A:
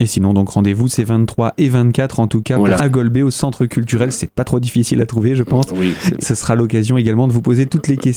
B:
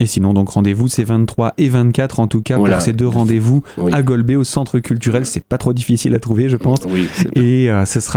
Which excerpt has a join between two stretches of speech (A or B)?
A